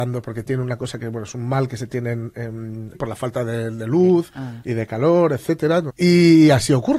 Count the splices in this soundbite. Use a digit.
2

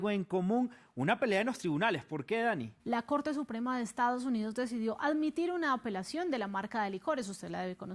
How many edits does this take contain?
1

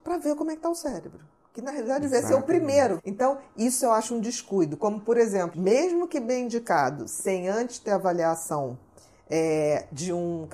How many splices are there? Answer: 2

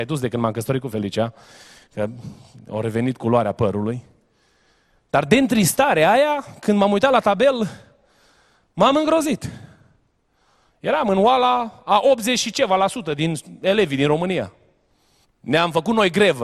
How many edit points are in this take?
1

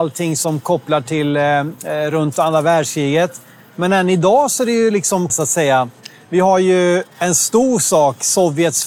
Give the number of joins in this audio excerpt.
1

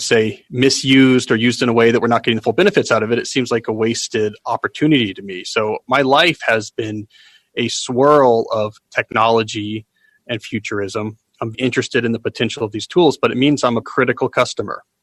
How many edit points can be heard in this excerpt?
2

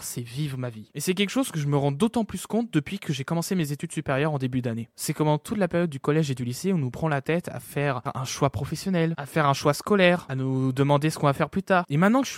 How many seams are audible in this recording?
0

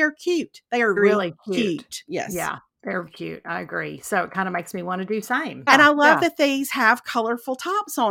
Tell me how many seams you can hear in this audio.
3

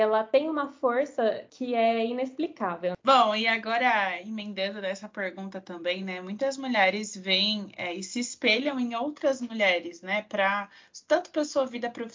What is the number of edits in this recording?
1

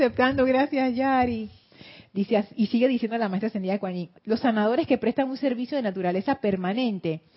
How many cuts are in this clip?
1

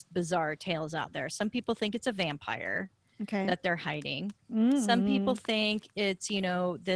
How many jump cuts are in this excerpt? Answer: 0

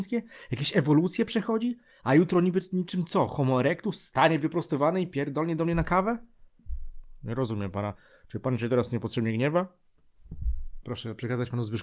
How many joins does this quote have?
1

